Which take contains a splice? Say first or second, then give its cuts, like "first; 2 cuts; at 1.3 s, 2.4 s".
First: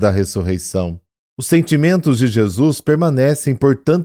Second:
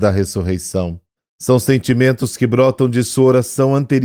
second; 1 cut; at 1.2 s